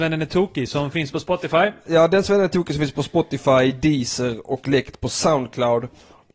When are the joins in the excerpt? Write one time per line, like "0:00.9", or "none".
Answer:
none